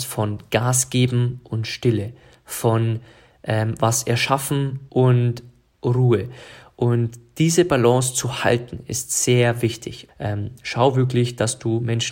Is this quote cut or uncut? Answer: cut